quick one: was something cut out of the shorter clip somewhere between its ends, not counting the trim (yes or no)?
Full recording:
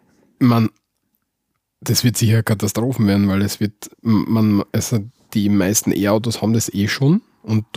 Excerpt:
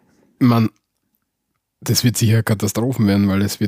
no